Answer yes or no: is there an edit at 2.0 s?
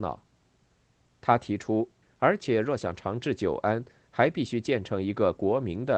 yes